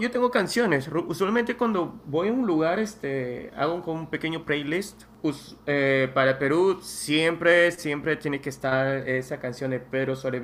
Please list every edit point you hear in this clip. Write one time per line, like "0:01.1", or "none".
none